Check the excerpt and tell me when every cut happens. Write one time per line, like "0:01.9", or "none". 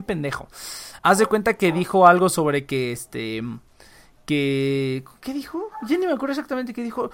none